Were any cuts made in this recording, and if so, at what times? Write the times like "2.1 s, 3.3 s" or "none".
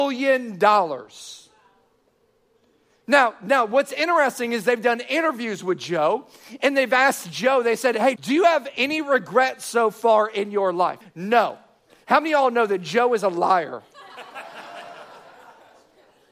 8.2 s, 11.0 s